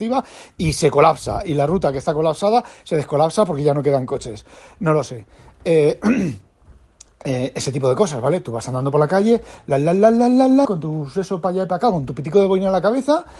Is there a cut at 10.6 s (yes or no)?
yes